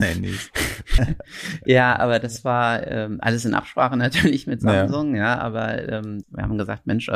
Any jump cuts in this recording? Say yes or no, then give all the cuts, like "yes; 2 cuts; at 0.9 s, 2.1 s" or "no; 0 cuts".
yes; 2 cuts; at 1.0 s, 6.2 s